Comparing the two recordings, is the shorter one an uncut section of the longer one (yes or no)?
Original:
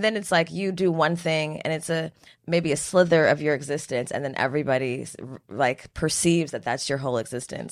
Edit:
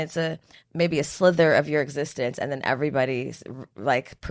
yes